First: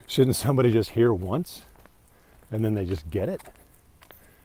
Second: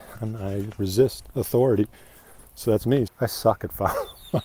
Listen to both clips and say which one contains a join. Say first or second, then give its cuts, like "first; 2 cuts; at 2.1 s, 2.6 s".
second; 1 cut; at 3.1 s